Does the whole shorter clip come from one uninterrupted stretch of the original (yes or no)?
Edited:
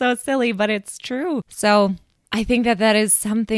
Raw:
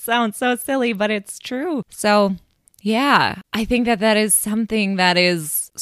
no